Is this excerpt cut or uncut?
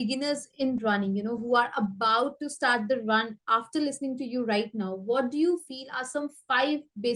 uncut